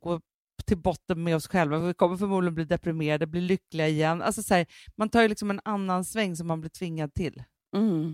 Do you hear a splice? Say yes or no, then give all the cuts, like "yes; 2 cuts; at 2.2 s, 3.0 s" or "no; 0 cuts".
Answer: no; 0 cuts